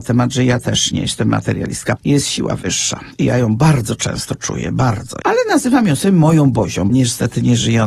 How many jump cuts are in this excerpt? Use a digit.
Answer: 3